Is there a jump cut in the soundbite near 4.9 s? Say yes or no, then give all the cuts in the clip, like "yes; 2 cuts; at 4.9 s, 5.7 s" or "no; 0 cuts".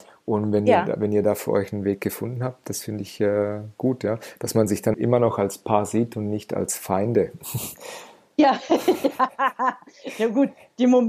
yes; 1 cut; at 4.9 s